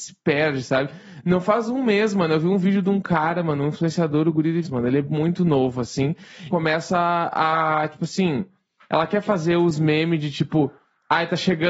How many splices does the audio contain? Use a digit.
2